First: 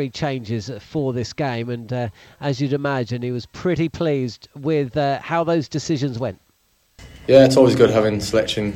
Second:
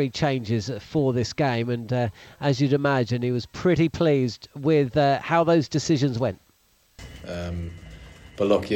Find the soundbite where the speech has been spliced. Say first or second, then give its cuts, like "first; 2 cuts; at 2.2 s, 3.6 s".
second; 1 cut; at 7.2 s